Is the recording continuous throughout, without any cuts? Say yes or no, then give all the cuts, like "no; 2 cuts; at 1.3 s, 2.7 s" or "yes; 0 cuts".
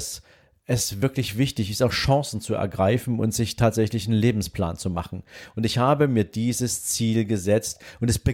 yes; 0 cuts